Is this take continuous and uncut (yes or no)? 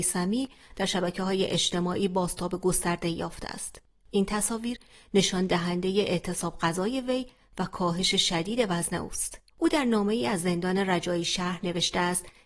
no